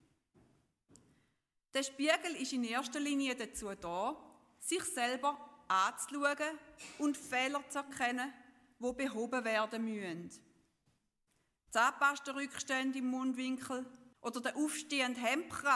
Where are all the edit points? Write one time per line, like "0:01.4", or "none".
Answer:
0:14.1